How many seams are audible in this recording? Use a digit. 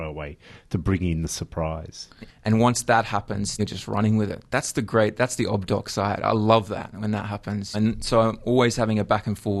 3